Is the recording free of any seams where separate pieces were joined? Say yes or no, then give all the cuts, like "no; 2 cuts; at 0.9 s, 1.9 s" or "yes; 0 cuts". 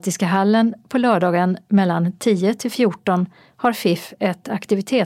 yes; 0 cuts